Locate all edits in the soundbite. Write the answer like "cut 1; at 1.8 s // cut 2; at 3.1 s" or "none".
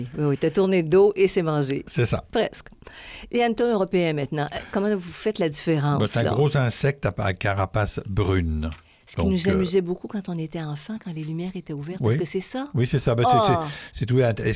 none